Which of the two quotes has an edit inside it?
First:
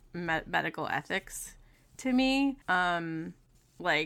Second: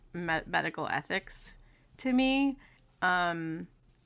first; 1 cut; at 2.6 s

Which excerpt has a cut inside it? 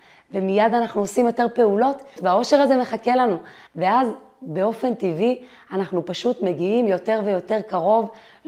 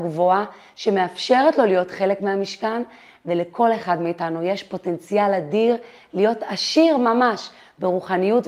first; 2 cuts; at 2.2 s, 3.7 s

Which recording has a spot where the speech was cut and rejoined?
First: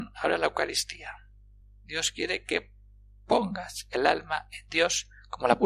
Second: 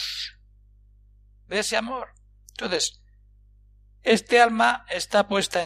first; 1 cut; at 1.6 s

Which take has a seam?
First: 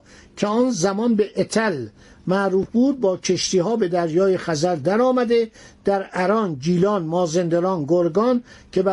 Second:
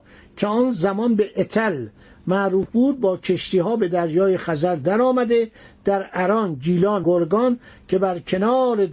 second; 1 cut; at 7.0 s

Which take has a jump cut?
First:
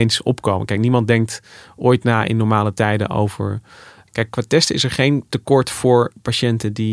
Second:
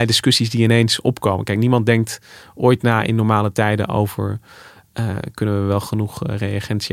first; 1 cut; at 4.1 s

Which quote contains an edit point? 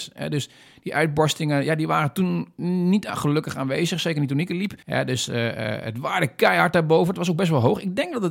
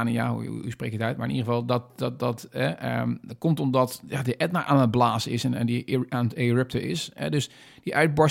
first; 1 cut; at 4.8 s

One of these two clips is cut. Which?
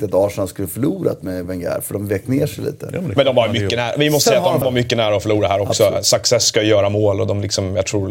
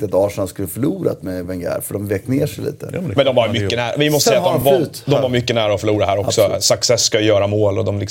first; 1 cut; at 4.6 s

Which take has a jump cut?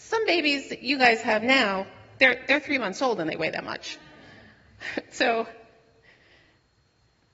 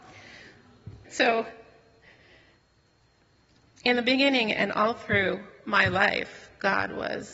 second; 1 cut; at 1.0 s

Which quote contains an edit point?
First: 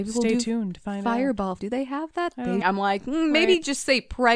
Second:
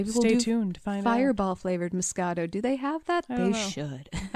first; 2 cuts; at 1.6 s, 2.6 s

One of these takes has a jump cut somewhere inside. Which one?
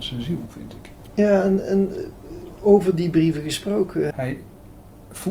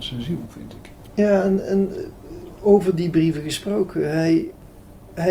first; 1 cut; at 4.1 s

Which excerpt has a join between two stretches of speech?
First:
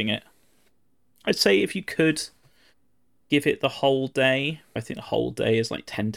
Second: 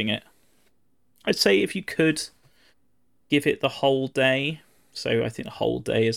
first; 1 cut; at 4.8 s

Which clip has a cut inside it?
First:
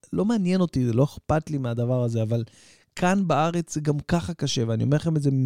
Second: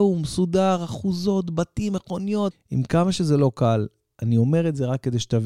second; 1 cut; at 2.5 s

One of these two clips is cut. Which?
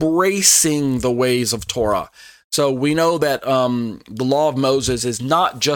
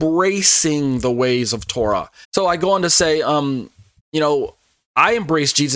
second; 1 cut; at 2.2 s

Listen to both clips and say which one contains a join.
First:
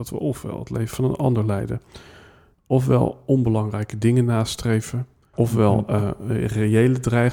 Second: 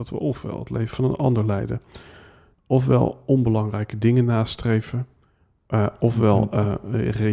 first; 1 cut; at 5.3 s

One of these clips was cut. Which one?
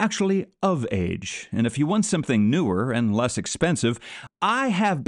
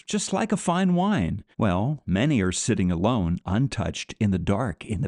second; 1 cut; at 1.5 s

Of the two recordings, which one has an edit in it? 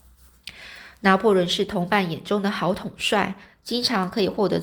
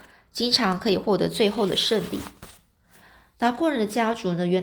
first; 1 cut; at 3.5 s

